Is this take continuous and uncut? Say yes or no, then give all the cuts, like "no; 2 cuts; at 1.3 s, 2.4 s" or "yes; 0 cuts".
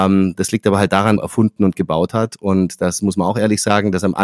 no; 1 cut; at 1.2 s